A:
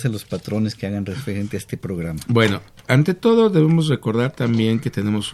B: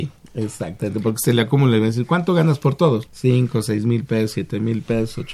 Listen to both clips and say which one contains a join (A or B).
B